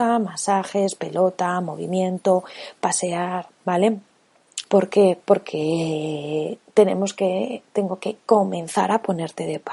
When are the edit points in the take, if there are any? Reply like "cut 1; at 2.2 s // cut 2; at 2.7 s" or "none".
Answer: cut 1; at 4.6 s